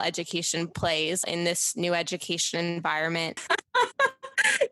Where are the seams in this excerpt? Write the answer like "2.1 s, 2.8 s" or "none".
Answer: 1.2 s, 3.4 s